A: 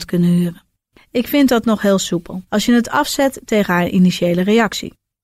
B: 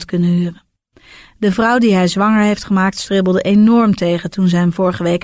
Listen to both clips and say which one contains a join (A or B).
A